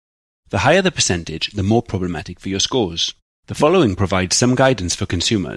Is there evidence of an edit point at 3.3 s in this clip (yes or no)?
yes